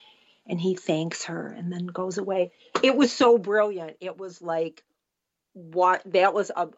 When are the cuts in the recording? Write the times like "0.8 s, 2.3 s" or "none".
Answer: none